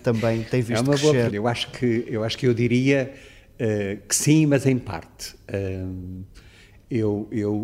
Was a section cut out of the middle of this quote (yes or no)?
yes